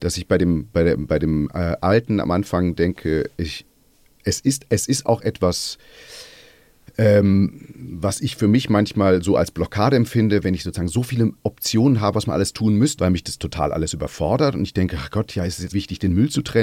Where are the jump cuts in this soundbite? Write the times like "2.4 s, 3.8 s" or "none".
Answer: 13.0 s, 15.7 s

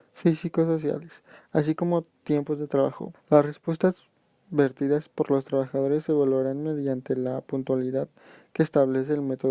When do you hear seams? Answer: 3.1 s

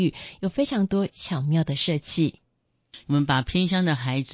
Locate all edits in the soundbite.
3.0 s

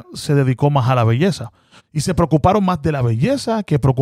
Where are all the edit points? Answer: 1.8 s

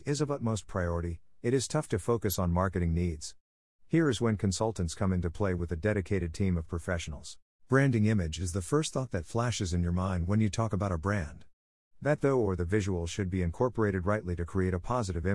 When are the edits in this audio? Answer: 7.6 s

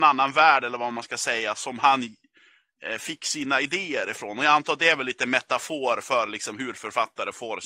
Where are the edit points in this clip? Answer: none

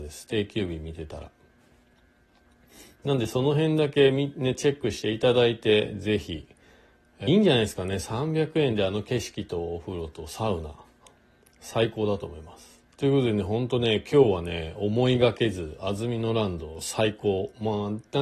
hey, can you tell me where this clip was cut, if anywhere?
7.3 s, 13.0 s

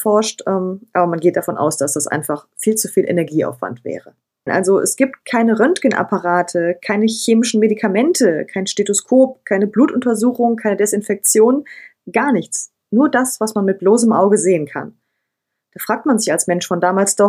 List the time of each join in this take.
4.5 s

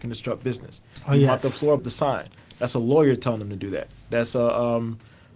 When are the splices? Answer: 1.8 s

